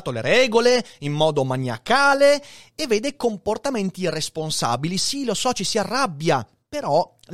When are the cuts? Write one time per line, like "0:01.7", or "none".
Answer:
none

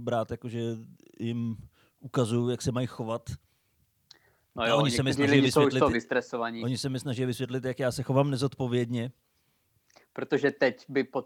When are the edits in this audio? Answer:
none

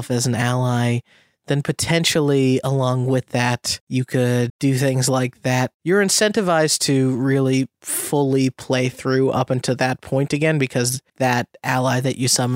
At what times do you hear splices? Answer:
0:04.5
0:11.1

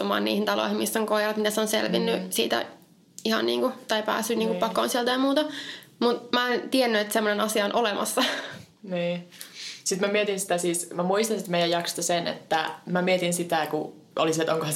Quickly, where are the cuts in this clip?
none

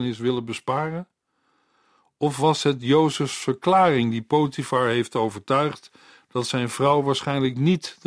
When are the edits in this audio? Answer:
none

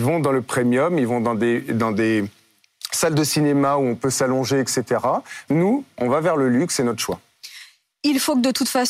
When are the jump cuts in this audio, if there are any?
0:05.5

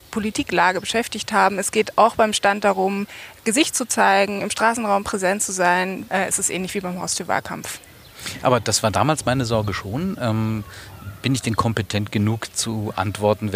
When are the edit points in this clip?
0:06.1

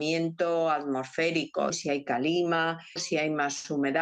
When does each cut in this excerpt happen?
0:01.7
0:03.0

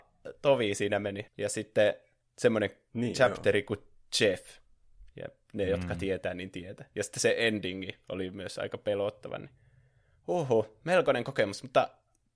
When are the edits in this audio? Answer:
0:01.3

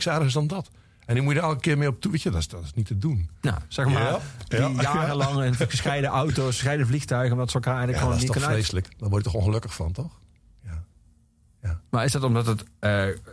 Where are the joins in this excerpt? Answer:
0:03.7
0:11.8

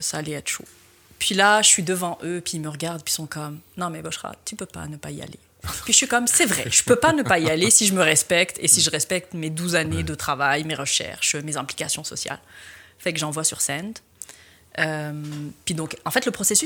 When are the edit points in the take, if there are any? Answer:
none

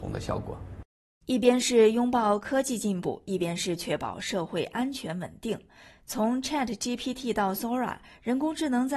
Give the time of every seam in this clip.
none

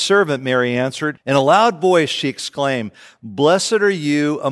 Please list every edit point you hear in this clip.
0:01.2

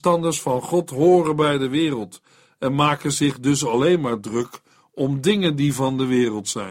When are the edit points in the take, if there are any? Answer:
none

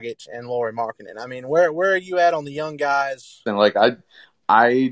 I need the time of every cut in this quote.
0:03.5

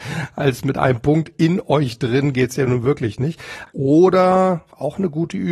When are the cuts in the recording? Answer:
0:03.7

